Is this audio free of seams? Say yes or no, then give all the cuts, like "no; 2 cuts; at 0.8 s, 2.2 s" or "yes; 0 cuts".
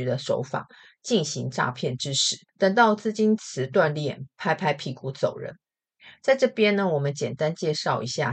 no; 1 cut; at 2.5 s